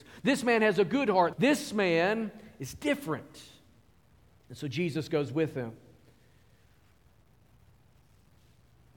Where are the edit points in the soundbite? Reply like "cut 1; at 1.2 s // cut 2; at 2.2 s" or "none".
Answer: cut 1; at 1.3 s